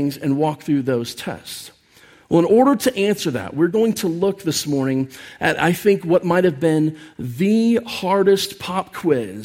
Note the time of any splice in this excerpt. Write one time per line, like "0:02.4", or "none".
none